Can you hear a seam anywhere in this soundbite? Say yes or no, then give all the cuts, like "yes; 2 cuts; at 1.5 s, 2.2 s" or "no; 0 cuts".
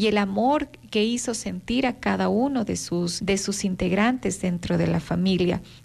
no; 0 cuts